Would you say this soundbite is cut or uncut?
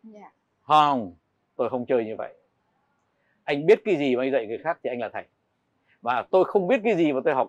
uncut